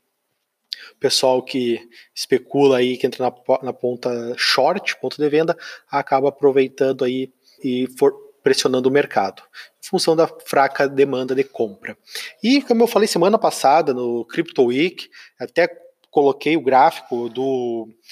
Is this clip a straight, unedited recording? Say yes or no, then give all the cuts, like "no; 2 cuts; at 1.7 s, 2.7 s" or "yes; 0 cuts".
no; 1 cut; at 7.6 s